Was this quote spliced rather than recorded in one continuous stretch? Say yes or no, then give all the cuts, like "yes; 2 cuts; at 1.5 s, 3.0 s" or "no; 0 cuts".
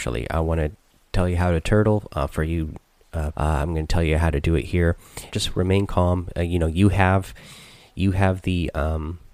yes; 2 cuts; at 3.3 s, 5.3 s